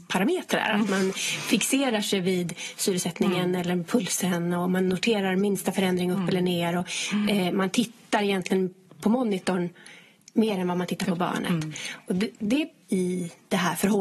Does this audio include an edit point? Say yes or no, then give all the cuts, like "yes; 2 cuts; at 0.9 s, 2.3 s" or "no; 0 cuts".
yes; 1 cut; at 12.8 s